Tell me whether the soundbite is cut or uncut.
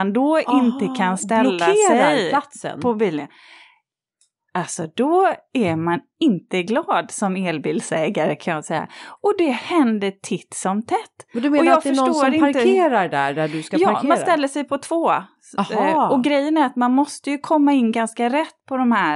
uncut